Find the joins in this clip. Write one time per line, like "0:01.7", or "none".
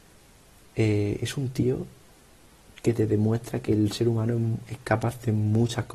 none